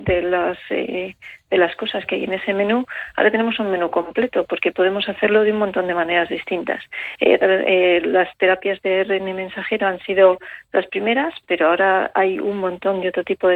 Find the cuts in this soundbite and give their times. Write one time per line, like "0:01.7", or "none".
none